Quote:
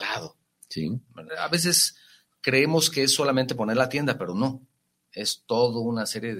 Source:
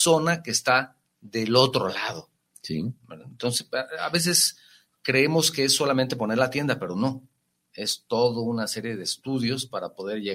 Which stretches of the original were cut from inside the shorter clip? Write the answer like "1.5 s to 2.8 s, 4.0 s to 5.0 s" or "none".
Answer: 3.2 s to 3.9 s